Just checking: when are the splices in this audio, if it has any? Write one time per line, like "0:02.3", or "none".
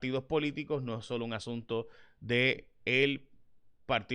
none